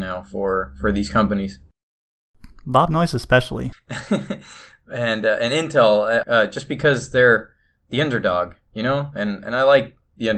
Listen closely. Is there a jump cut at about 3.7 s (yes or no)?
yes